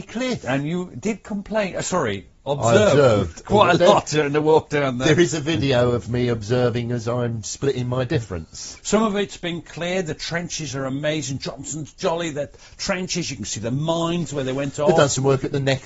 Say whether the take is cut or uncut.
cut